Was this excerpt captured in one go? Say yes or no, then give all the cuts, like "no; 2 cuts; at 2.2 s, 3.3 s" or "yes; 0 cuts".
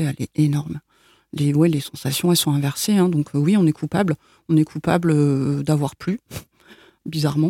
yes; 0 cuts